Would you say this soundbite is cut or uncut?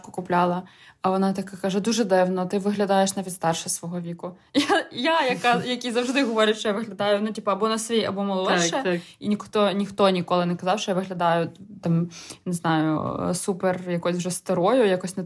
uncut